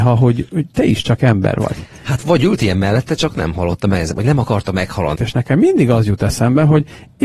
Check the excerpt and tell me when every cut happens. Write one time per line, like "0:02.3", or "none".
0:05.1